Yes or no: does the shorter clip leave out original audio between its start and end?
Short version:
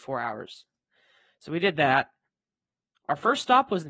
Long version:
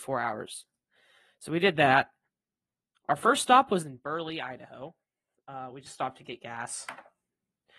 no